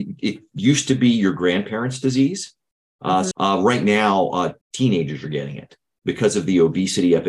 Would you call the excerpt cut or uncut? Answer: cut